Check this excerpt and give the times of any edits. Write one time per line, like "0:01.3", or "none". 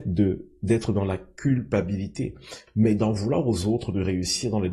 0:02.7